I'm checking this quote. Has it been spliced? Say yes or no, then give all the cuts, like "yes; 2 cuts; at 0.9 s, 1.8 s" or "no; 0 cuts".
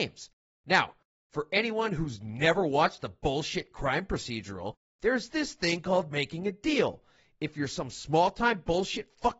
no; 0 cuts